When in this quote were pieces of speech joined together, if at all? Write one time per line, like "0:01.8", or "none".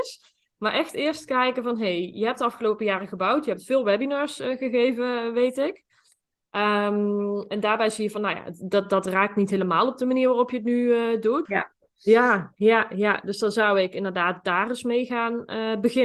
0:11.5